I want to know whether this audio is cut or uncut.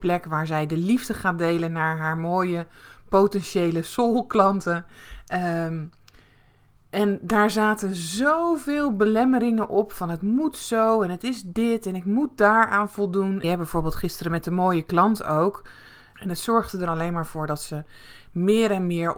cut